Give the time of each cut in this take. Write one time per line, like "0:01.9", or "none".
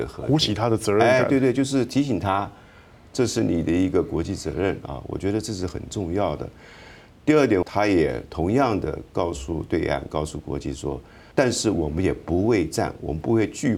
0:07.6
0:11.3